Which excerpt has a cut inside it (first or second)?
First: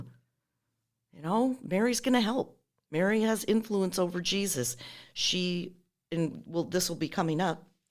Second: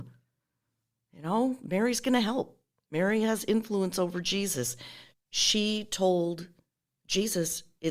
second